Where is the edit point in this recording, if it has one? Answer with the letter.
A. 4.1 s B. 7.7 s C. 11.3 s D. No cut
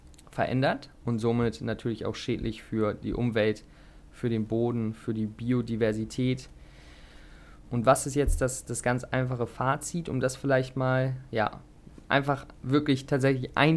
B